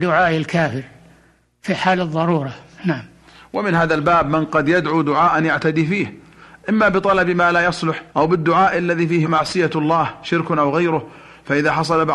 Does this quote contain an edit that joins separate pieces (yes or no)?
yes